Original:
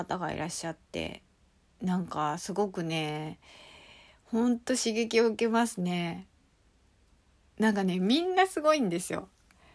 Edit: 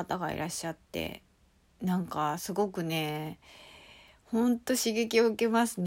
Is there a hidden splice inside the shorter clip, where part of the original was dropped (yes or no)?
no